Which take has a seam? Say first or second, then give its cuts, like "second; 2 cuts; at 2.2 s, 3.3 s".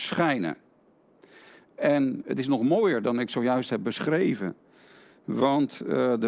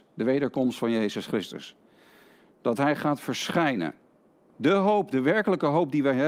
second; 1 cut; at 4.5 s